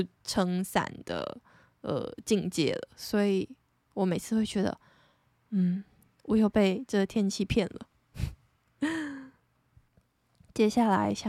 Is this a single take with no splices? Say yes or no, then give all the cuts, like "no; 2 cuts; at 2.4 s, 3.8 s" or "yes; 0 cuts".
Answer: yes; 0 cuts